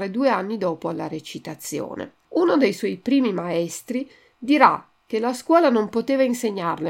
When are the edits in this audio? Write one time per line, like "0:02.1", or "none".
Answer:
0:02.2

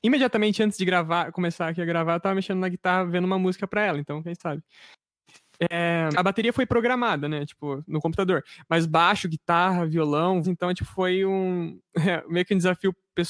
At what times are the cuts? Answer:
0:06.1
0:10.4

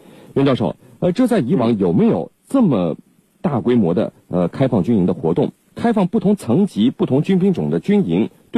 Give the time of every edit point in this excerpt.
none

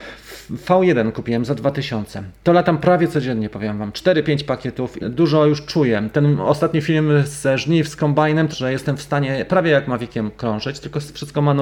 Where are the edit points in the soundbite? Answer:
0:05.0
0:08.5

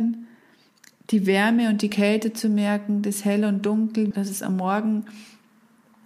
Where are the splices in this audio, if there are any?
0:04.1

